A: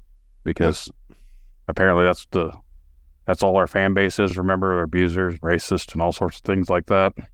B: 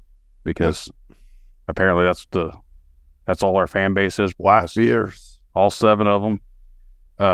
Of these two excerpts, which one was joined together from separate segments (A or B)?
B